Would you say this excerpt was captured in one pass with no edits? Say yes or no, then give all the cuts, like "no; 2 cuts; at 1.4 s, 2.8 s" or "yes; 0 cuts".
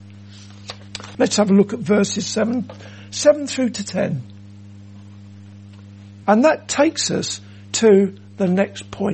no; 2 cuts; at 1.1 s, 6.2 s